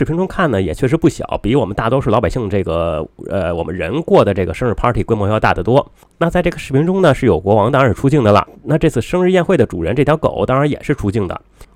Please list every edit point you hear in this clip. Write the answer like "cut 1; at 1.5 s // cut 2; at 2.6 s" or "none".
none